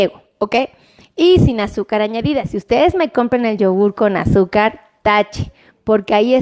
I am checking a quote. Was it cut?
no; 0 cuts

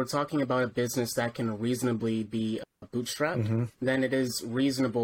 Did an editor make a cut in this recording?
no; 0 cuts

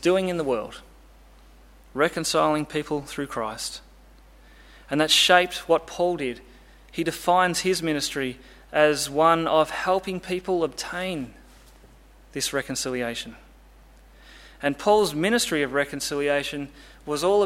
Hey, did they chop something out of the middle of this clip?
no; 0 cuts

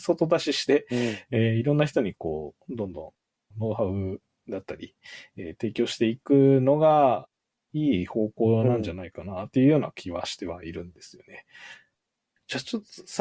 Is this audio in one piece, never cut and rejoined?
yes; 0 cuts

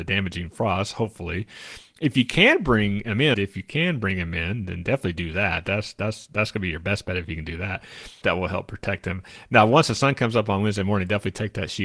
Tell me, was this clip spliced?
yes; 2 cuts; at 3.3 s, 8.2 s

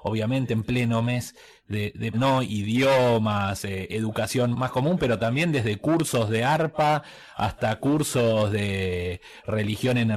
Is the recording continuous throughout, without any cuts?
no; 2 cuts; at 2.1 s, 4.5 s

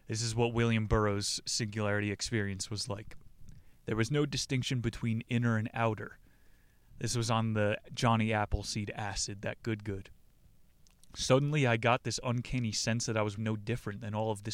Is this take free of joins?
no; 1 cut; at 13.4 s

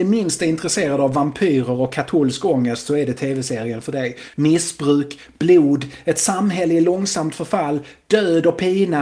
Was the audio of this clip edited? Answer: yes; 1 cut; at 4.3 s

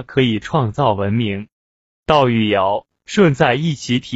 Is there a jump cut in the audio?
no; 0 cuts

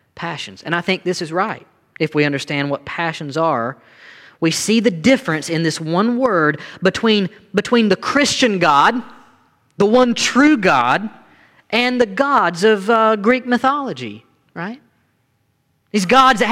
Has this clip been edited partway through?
no; 0 cuts

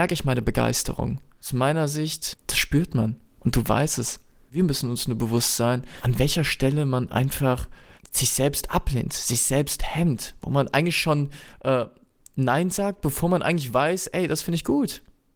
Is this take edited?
no; 0 cuts

